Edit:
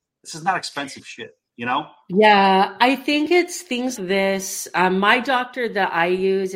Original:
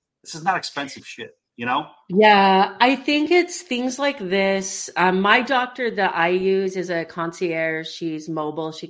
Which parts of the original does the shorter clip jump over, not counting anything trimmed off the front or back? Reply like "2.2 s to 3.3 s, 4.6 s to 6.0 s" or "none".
4.0 s to 4.2 s